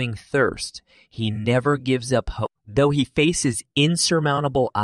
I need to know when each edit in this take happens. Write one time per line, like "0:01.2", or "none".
0:02.5